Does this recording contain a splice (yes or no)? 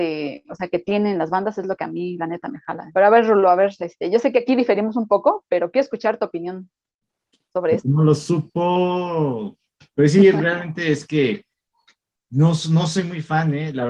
yes